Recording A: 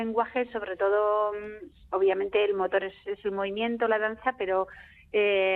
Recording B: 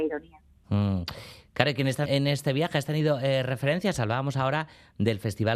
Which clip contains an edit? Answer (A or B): B